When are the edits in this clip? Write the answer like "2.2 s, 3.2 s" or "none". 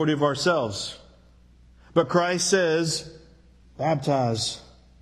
3.6 s